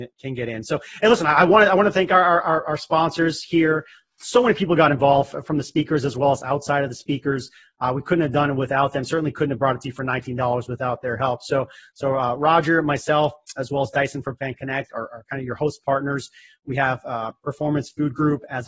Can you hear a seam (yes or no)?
no